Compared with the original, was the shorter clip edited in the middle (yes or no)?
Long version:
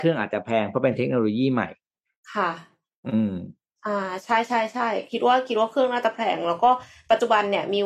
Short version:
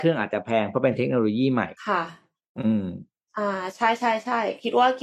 yes